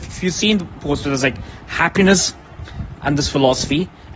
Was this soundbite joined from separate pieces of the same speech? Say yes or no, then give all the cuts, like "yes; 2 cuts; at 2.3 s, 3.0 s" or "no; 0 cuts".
yes; 1 cut; at 3.0 s